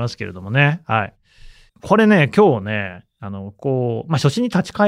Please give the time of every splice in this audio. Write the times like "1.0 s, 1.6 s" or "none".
1.7 s